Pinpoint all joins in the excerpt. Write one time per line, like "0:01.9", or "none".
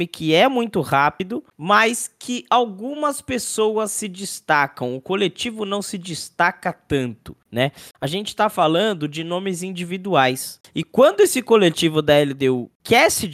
0:07.9
0:10.6